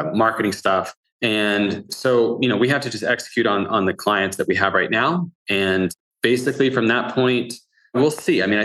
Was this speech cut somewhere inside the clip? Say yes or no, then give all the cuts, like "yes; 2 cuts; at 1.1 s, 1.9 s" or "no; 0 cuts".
no; 0 cuts